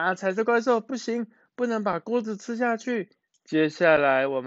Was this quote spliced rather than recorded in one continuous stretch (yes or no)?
yes